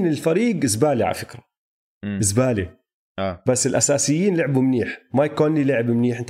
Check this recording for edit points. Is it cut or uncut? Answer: uncut